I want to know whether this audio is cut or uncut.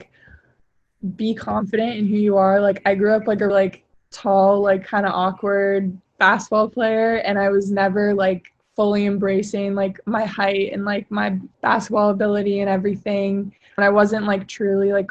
cut